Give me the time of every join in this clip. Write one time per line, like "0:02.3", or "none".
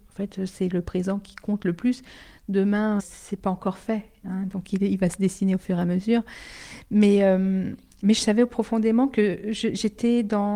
0:03.0